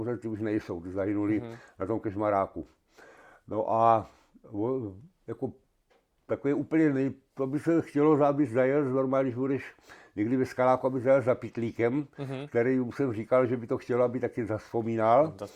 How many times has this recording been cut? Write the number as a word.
zero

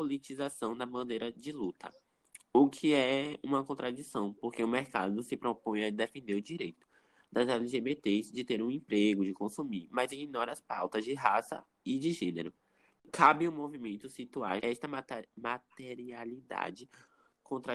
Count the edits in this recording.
one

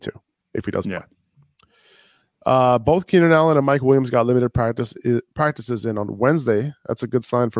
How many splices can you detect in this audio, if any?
zero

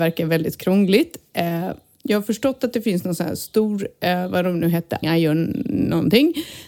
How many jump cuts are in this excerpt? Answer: one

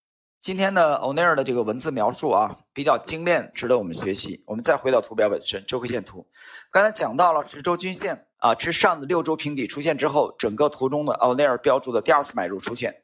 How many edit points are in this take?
two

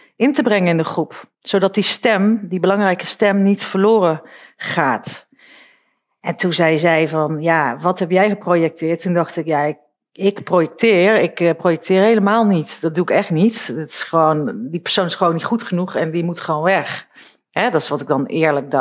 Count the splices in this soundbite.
zero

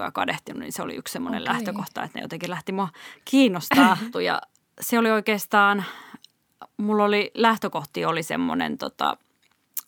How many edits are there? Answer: one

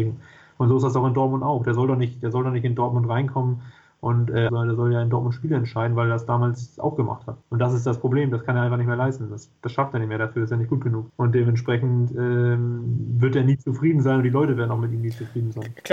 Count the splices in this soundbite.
one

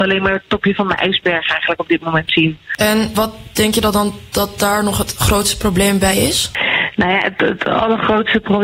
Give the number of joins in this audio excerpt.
zero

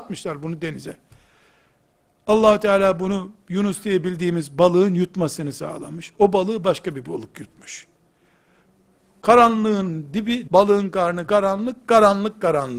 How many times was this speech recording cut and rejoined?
one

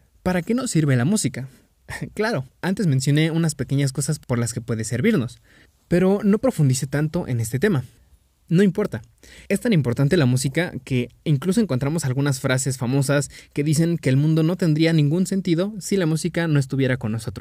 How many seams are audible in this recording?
one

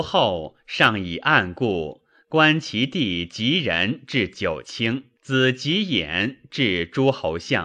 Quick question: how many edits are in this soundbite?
one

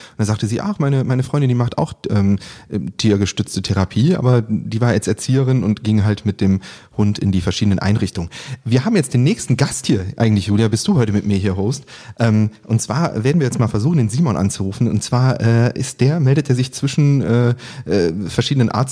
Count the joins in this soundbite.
zero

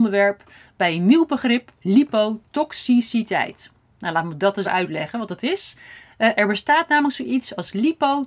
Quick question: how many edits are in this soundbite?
two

